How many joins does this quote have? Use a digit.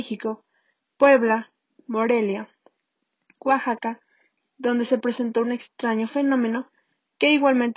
1